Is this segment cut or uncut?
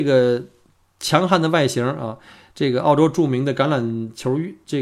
uncut